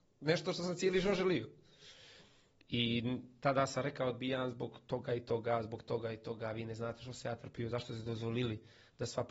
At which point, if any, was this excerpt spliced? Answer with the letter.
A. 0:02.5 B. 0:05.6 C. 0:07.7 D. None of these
D